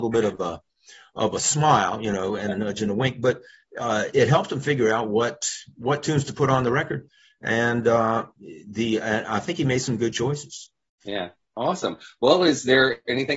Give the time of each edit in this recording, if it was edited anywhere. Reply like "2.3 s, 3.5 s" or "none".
4.1 s